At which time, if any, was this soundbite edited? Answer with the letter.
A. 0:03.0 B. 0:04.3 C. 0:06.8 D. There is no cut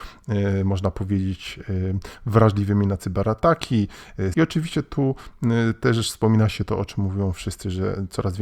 B